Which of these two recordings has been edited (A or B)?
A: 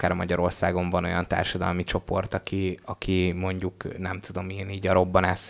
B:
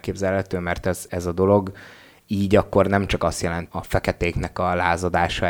B